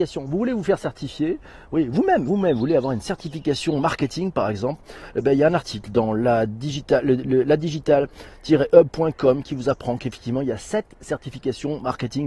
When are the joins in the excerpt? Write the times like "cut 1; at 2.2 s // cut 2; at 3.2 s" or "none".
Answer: cut 1; at 2.3 s